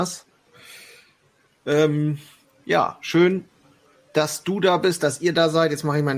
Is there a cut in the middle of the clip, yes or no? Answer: no